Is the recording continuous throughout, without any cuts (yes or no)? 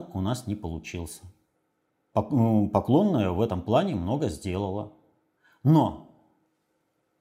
yes